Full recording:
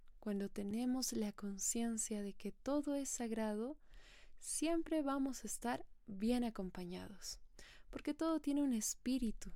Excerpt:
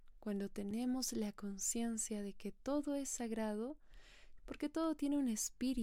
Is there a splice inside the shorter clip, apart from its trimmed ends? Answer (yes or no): yes